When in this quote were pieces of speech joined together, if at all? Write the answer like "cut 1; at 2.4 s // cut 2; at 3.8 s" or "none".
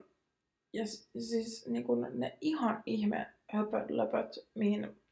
none